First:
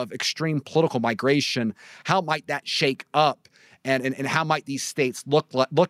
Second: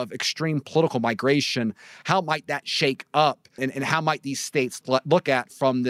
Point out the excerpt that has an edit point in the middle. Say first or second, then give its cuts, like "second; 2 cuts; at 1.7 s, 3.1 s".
second; 2 cuts; at 3.6 s, 4.8 s